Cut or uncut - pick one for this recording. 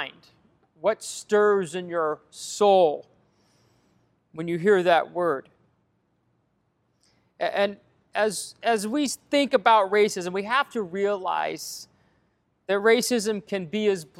uncut